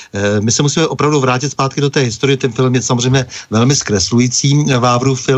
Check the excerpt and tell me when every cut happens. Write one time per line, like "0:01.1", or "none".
none